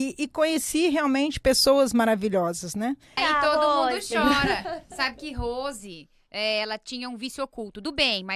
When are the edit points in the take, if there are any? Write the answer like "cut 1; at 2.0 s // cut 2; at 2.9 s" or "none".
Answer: cut 1; at 3.2 s